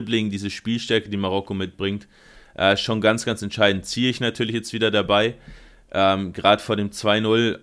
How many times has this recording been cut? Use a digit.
0